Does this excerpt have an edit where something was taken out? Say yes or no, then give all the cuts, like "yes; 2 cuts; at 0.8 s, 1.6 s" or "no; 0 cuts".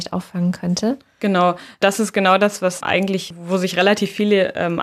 no; 0 cuts